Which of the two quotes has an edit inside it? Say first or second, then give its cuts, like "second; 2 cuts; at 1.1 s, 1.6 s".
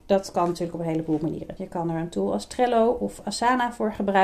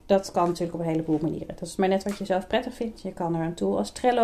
first; 1 cut; at 1.6 s